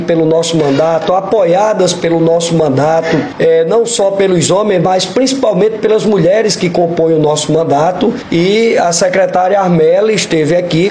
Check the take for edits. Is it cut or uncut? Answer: uncut